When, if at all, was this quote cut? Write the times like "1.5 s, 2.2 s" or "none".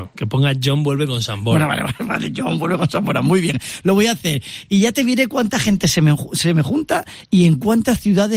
none